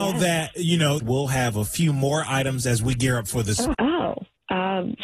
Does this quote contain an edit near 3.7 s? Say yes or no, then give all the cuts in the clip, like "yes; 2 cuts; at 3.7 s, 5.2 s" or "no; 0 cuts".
yes; 2 cuts; at 1.0 s, 3.7 s